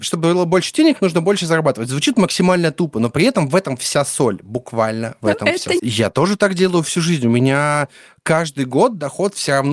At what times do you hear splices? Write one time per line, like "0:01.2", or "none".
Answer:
0:05.8